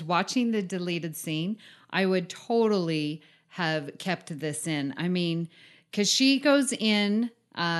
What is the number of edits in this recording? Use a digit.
0